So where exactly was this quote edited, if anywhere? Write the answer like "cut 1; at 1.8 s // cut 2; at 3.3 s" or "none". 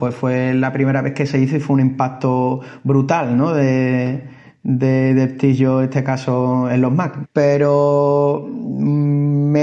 cut 1; at 7.2 s